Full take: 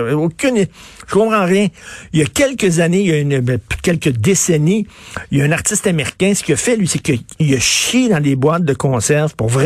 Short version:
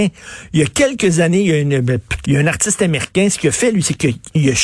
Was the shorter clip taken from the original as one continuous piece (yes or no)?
no